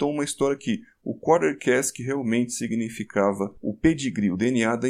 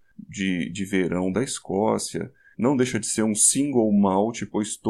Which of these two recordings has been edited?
second; 1 cut; at 2.5 s

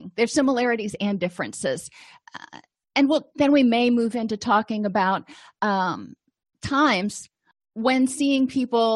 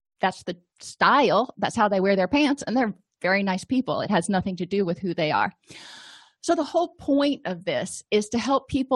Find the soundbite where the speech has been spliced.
first; 1 cut; at 3.3 s

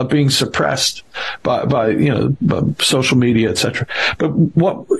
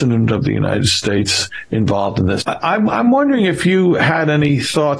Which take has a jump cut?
second; 1 cut; at 2.4 s

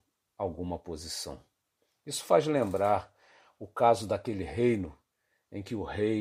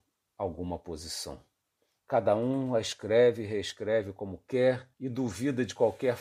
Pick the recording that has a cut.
second; 2 cuts; at 2.0 s, 4.9 s

